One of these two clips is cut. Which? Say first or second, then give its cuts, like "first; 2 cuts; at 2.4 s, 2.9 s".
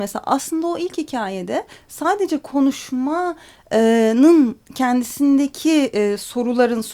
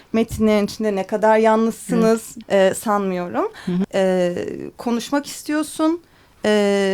second; 2 cuts; at 2.4 s, 3.8 s